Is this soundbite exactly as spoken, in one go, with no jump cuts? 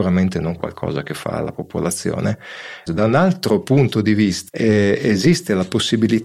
no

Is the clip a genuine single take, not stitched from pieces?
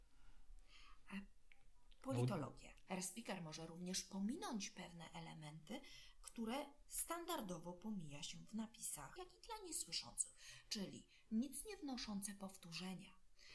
no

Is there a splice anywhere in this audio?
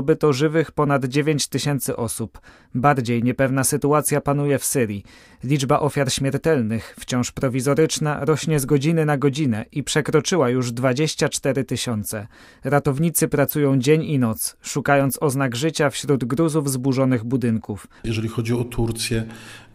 yes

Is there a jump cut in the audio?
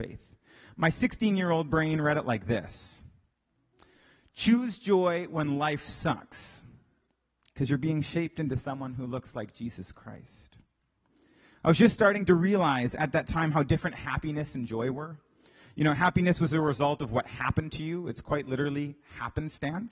no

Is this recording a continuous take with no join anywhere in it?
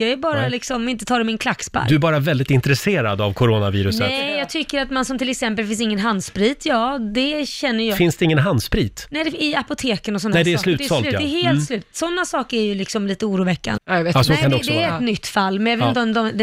no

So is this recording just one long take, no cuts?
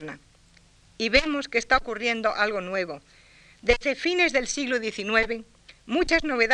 yes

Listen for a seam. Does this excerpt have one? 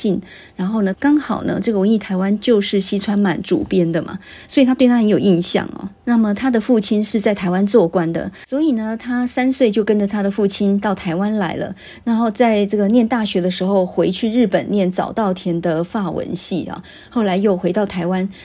yes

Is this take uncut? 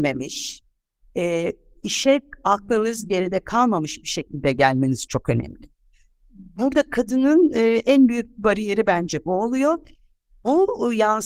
no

